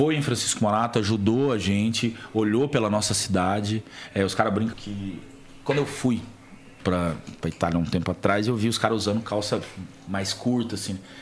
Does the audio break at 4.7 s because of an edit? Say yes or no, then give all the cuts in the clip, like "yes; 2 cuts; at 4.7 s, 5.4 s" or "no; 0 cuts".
yes; 1 cut; at 4.7 s